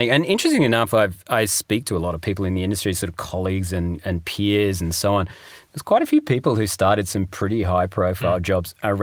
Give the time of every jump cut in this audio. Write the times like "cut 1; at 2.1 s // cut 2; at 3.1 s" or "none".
none